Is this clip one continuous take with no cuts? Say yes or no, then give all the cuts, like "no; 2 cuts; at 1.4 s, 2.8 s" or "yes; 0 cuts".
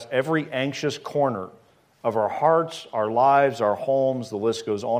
yes; 0 cuts